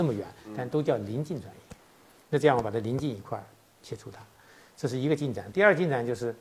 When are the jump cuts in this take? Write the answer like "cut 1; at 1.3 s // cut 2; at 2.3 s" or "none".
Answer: none

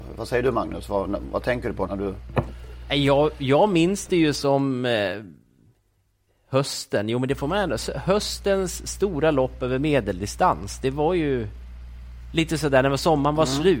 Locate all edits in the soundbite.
cut 1; at 1.9 s

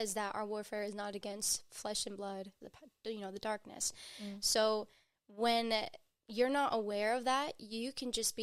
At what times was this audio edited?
cut 1; at 2.6 s

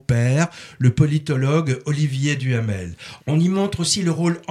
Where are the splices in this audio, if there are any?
cut 1; at 3.2 s

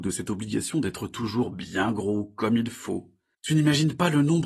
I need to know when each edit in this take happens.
cut 1; at 3.3 s

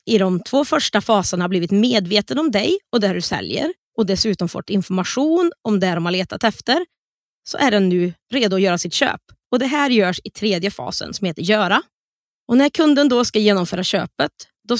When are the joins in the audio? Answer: none

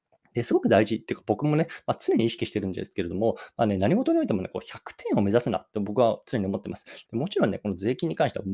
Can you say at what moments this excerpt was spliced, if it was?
cut 1; at 7.0 s

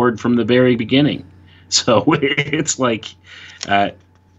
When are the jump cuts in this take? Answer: none

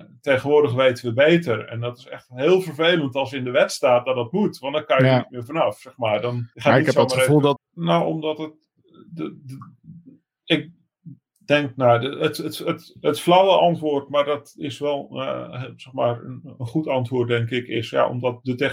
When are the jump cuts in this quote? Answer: cut 1; at 6.5 s // cut 2; at 7.6 s

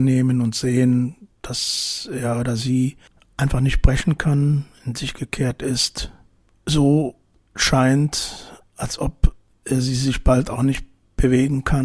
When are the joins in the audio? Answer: none

